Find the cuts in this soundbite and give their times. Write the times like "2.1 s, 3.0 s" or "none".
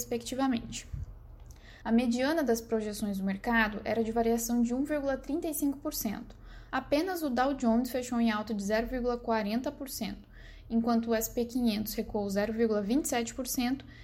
1.8 s, 6.7 s